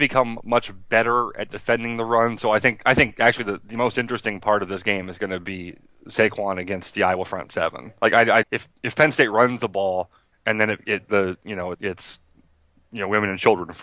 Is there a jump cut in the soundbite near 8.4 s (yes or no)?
yes